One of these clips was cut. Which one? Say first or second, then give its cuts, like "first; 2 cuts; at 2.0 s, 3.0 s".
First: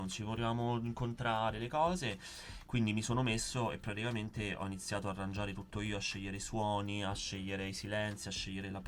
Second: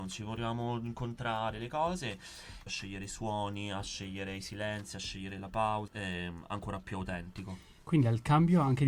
second; 2 cuts; at 2.7 s, 5.9 s